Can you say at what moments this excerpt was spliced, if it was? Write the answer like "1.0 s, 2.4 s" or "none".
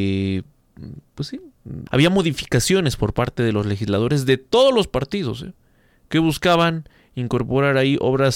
1.9 s

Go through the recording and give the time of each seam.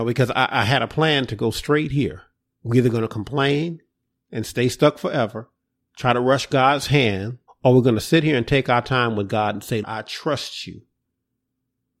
2.5 s, 7.5 s, 9.8 s

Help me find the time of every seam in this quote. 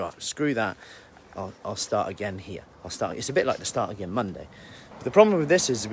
2.7 s, 4.9 s

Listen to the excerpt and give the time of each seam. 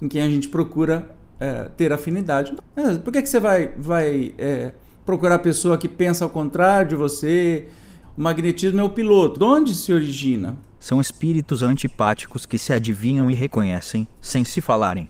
2.6 s, 8.0 s, 9.3 s

